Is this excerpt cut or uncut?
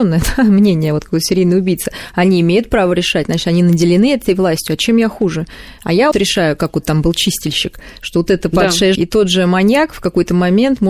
cut